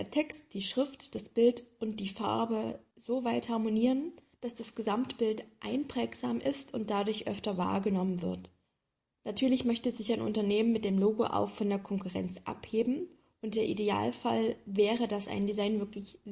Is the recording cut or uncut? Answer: uncut